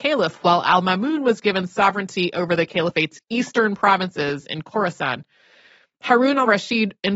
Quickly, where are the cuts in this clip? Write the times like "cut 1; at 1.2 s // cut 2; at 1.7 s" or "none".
none